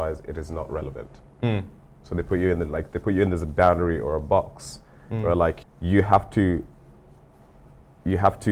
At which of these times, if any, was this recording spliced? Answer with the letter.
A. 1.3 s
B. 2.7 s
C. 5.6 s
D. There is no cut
C